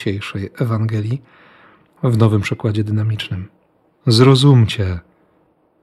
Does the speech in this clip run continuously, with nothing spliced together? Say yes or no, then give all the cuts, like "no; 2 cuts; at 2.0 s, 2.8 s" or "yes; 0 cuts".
yes; 0 cuts